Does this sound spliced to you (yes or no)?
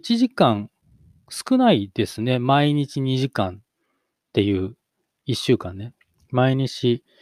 no